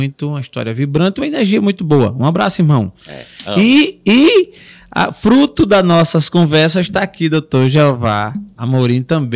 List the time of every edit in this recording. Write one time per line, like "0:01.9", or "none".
none